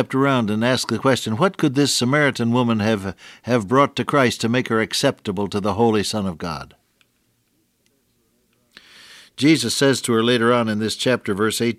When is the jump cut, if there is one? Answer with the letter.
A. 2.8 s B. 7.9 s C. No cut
C